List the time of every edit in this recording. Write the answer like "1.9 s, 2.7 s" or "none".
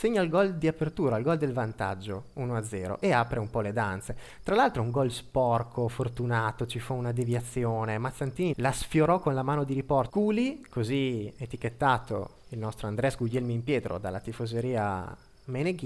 8.5 s, 10.1 s